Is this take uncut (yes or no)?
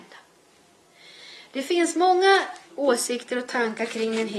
no